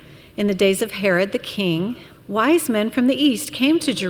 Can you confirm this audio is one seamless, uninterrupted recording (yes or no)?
no